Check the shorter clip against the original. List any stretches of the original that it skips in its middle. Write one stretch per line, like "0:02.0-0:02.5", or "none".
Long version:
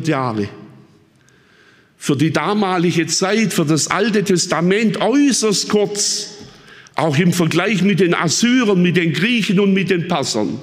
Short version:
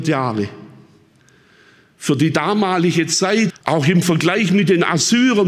0:03.5-0:06.8